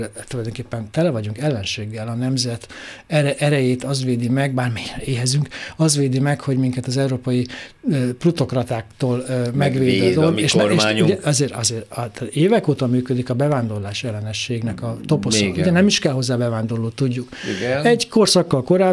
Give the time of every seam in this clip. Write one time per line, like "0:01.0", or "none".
none